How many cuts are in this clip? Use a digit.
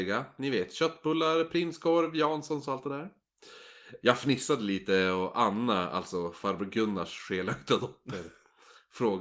1